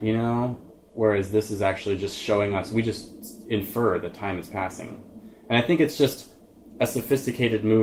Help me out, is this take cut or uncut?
uncut